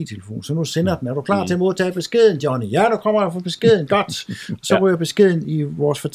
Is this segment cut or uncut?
uncut